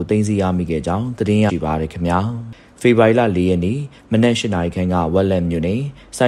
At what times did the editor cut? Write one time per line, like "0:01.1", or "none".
0:01.5